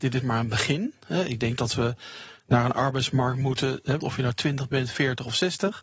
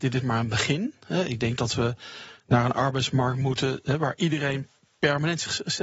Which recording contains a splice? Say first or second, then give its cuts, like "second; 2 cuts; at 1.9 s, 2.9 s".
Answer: first; 1 cut; at 4.0 s